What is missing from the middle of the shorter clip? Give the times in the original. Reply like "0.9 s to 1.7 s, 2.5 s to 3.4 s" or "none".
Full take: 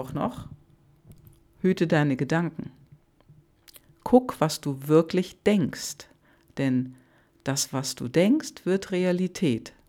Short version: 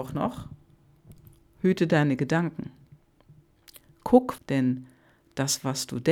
4.4 s to 6.5 s